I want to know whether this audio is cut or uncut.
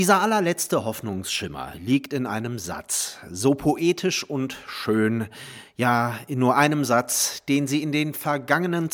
uncut